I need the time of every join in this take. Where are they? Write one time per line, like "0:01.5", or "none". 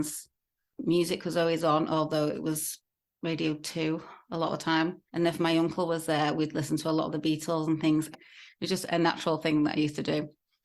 0:05.1
0:08.1